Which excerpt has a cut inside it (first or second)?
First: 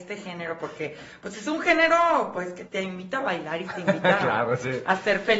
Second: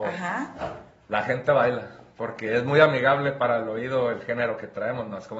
first